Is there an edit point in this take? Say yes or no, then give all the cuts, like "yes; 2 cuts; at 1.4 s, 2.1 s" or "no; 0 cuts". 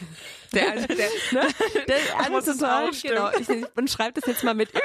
yes; 1 cut; at 2.3 s